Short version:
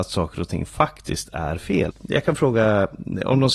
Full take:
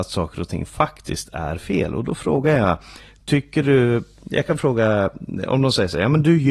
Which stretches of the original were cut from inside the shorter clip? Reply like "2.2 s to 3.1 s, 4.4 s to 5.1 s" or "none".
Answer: 1.9 s to 4.1 s